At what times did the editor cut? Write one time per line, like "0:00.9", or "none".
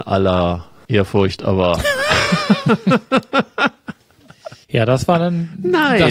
0:04.6